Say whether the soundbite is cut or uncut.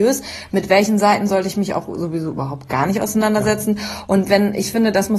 uncut